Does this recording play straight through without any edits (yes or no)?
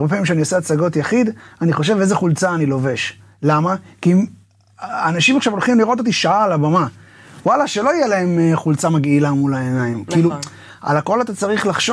yes